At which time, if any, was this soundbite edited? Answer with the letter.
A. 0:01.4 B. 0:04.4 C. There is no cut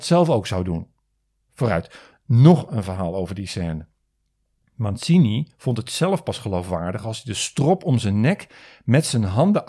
A